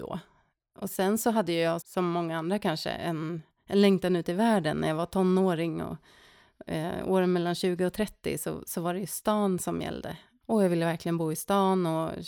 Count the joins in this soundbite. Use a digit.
1